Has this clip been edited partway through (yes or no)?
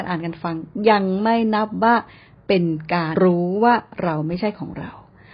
yes